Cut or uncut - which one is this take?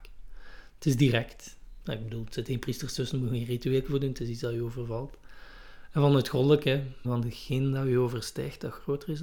cut